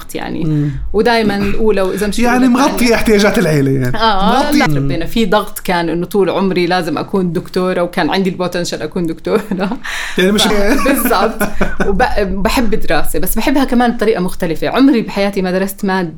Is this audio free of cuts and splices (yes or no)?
no